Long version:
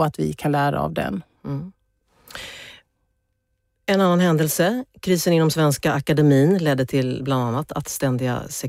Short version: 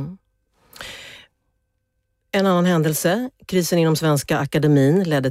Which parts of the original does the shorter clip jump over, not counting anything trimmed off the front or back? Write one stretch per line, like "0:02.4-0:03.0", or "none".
none